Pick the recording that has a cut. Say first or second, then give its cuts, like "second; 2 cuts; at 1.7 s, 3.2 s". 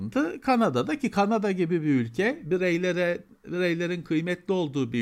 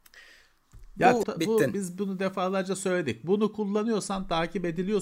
second; 1 cut; at 1.2 s